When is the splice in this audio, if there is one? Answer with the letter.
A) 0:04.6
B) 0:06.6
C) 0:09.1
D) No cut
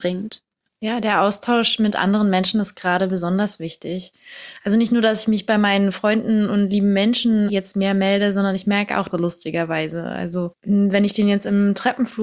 C